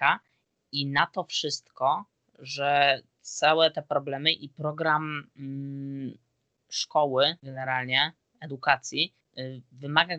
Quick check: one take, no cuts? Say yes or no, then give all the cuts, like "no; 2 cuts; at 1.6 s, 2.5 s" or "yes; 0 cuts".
no; 1 cut; at 7.4 s